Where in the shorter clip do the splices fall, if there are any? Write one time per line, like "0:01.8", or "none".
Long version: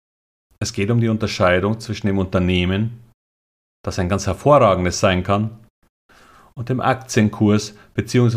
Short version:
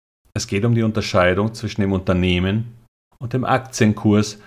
0:03.1